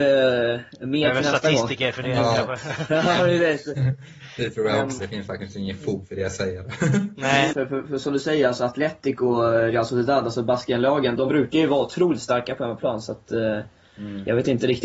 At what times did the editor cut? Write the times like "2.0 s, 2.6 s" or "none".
5.0 s, 7.5 s, 11.2 s